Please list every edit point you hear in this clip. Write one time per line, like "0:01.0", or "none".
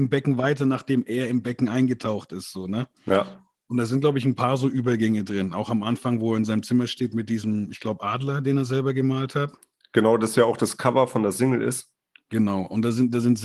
none

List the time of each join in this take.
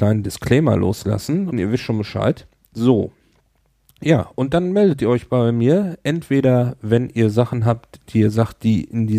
0:01.5

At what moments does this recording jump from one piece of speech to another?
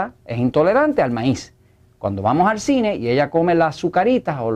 none

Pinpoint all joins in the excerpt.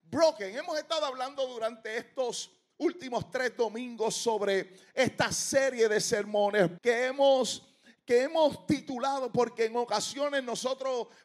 0:06.8

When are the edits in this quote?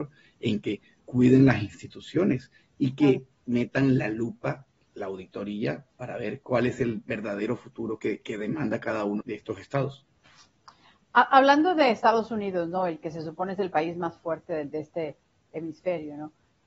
0:09.2

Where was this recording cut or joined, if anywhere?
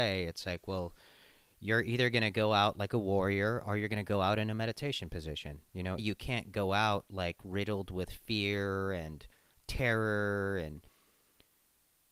0:06.0

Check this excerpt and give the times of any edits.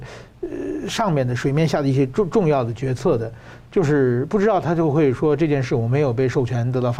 0:03.6

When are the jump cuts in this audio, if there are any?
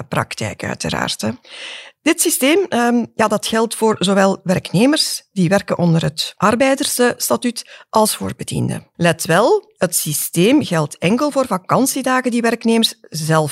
none

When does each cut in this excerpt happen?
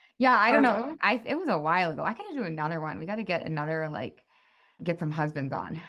0:01.0

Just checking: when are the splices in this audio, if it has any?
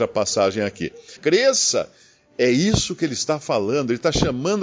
0:01.2

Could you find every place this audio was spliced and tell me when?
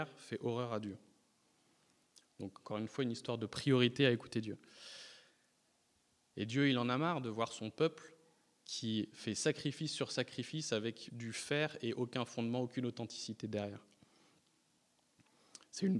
0:06.3
0:11.1

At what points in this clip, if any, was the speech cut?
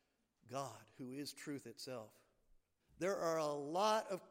0:02.8

